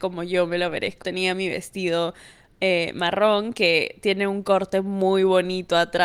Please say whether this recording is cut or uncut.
cut